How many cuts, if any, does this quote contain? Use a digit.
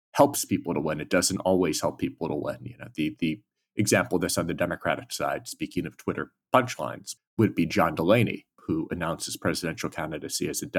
2